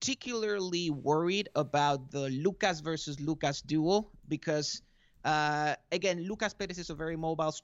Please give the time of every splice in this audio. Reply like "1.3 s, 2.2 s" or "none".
none